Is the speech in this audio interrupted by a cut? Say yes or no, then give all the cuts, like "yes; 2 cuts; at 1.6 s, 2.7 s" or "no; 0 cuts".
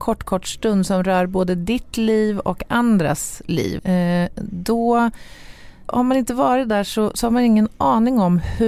yes; 2 cuts; at 3.8 s, 5.9 s